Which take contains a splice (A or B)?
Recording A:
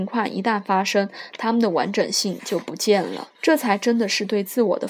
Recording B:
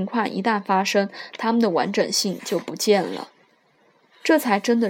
A